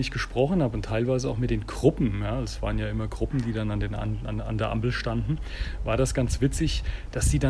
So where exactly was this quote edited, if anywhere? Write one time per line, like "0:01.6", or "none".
none

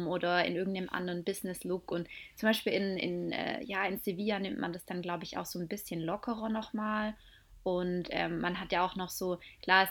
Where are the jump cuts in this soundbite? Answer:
none

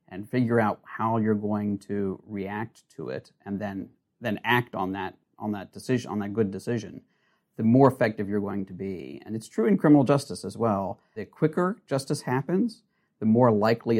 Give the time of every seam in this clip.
none

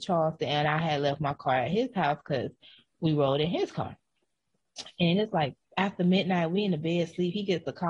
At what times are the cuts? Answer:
0:05.6

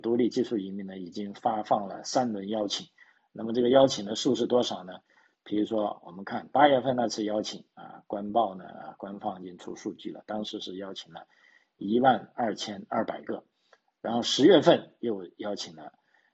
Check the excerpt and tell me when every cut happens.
0:05.3

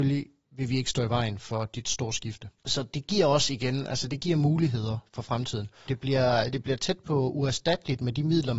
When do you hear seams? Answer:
0:02.6
0:05.9

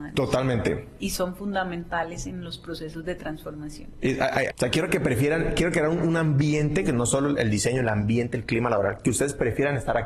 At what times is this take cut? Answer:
0:04.5

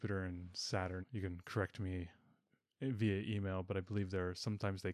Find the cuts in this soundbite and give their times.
0:01.0

